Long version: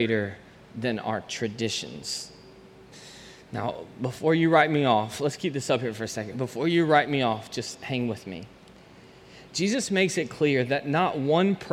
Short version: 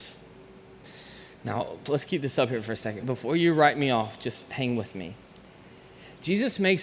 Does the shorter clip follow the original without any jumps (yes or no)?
no